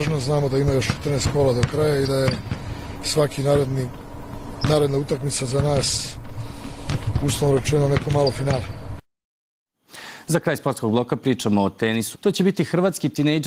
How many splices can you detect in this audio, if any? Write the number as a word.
one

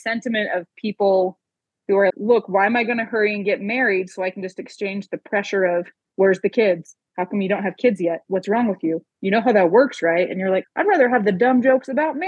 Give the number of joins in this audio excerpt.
two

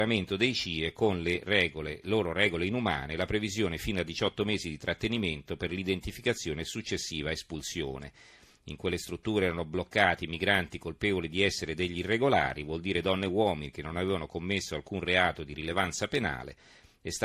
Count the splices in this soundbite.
one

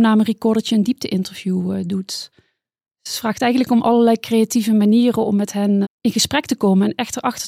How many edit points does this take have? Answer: one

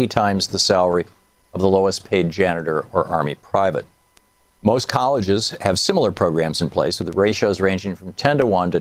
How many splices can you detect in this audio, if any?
zero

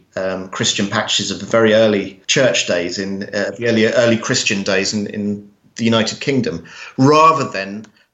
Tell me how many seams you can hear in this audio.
one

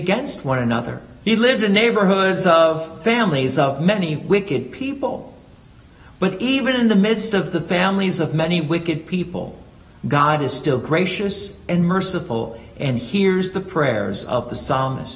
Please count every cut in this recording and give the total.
one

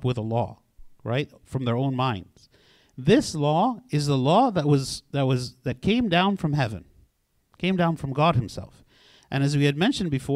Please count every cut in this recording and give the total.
zero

